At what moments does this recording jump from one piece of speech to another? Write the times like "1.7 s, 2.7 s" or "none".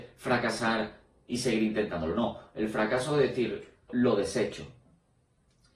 3.9 s

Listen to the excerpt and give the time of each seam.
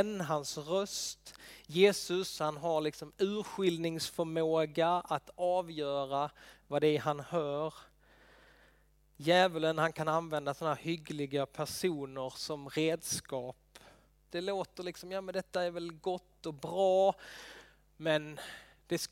14.3 s

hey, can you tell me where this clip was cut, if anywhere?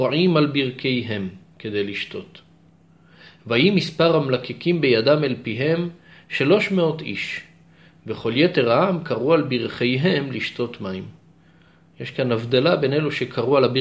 none

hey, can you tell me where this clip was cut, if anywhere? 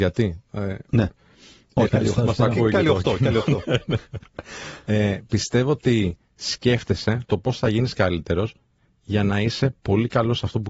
1.9 s

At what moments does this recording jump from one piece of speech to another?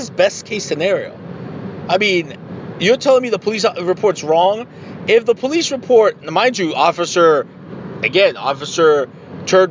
none

